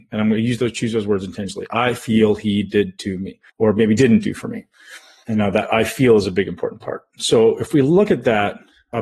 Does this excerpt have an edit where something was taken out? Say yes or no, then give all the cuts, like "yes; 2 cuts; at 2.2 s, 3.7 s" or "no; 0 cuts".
yes; 1 cut; at 3.5 s